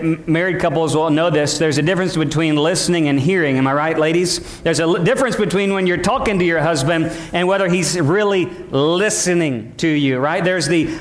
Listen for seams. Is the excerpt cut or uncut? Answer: uncut